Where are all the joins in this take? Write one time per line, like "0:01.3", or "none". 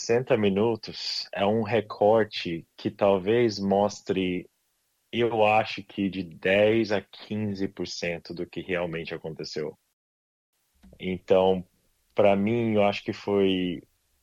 none